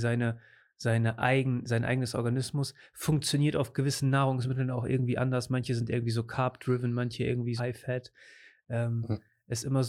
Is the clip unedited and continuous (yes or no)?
no